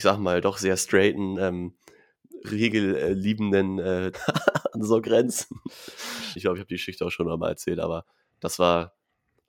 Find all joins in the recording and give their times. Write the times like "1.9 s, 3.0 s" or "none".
4.1 s, 6.4 s